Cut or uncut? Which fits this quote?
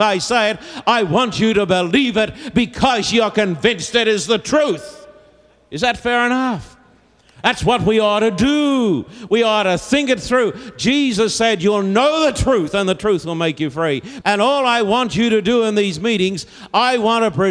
cut